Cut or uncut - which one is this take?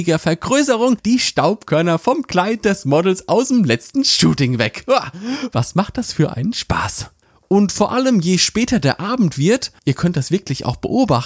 uncut